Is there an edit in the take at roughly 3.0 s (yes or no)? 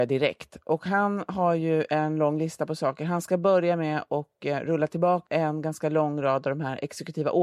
no